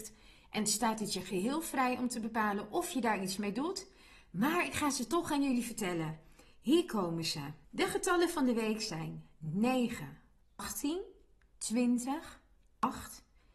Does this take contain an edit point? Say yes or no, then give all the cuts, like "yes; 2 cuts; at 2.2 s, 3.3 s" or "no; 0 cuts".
yes; 2 cuts; at 7.6 s, 11.5 s